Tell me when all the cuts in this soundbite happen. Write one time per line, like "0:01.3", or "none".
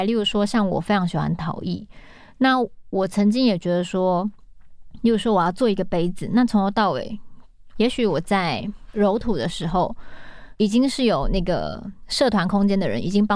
0:07.7